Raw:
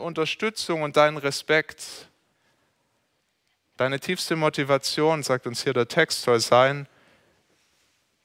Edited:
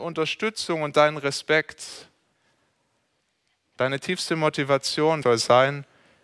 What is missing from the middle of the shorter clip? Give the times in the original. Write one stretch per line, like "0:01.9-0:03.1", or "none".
0:05.2-0:06.2